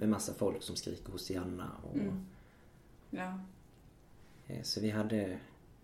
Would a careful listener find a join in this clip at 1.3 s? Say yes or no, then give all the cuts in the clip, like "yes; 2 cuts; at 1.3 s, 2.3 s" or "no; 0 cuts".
no; 2 cuts; at 3.0 s, 4.4 s